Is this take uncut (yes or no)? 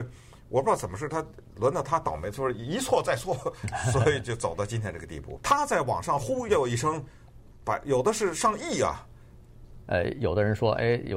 no